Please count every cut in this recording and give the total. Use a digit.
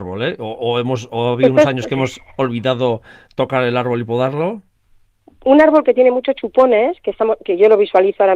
0